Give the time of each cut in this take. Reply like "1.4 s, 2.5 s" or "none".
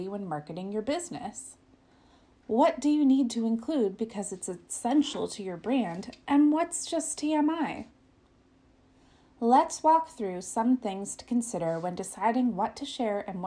none

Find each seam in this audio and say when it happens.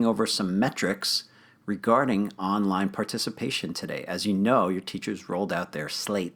none

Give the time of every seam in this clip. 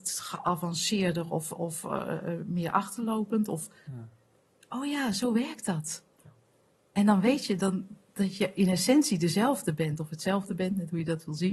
none

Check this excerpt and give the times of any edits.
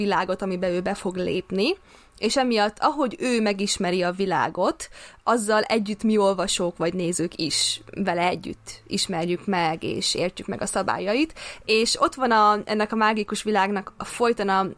none

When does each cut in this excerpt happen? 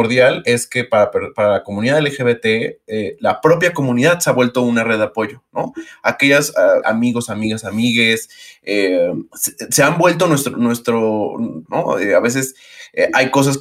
6.8 s, 11.7 s

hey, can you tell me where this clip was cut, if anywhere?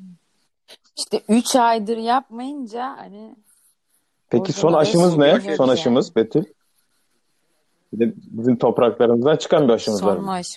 none

